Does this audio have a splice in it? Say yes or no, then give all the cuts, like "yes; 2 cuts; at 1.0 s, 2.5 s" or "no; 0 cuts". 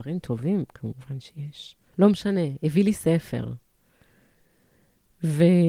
yes; 1 cut; at 1.9 s